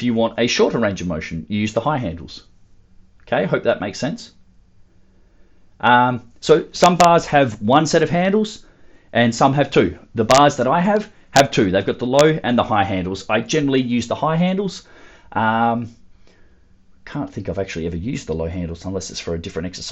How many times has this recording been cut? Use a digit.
0